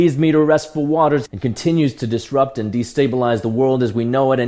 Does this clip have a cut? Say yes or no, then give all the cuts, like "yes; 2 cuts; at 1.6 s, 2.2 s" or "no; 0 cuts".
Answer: yes; 1 cut; at 1.3 s